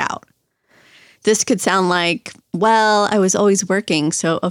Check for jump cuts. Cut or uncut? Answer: uncut